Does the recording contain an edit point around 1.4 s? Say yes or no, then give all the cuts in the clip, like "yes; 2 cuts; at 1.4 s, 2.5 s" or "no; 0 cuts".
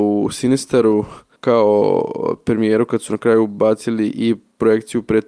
yes; 1 cut; at 1.4 s